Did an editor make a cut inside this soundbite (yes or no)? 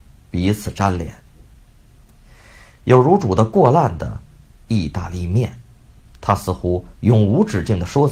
yes